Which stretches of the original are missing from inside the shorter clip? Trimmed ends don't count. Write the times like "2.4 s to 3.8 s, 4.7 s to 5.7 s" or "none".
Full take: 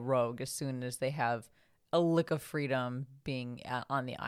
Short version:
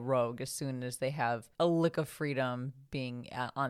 1.5 s to 1.9 s